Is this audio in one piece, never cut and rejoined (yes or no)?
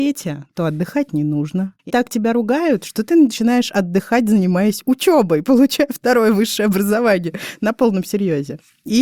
no